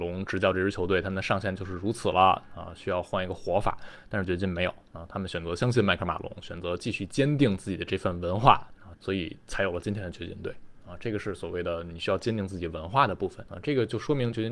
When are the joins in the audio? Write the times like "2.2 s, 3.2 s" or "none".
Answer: 8.9 s, 13.5 s